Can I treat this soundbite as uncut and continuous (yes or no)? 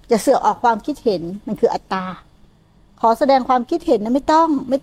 yes